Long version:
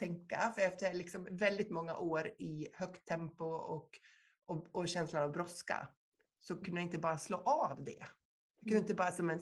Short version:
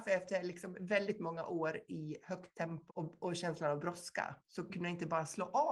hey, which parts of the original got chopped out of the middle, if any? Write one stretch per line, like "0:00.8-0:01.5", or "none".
0:03.4-0:04.4
0:05.9-0:06.3